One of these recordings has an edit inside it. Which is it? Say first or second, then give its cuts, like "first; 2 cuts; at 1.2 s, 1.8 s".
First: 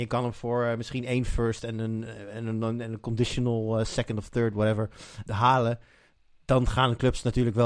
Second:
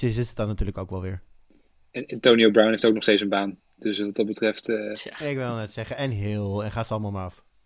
first; 1 cut; at 5.3 s